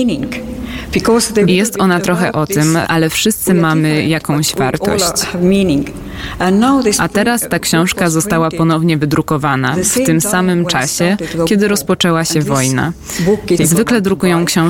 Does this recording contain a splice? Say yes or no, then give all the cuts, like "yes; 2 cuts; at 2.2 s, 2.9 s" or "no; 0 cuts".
yes; 3 cuts; at 1.5 s, 2.8 s, 13.6 s